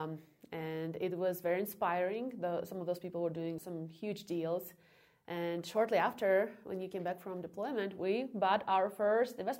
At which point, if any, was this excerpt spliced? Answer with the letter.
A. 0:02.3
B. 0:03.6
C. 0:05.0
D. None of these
B